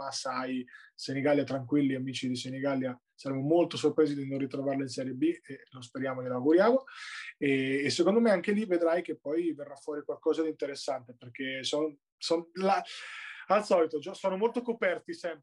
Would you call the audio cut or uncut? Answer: uncut